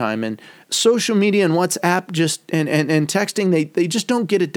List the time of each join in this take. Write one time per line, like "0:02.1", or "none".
none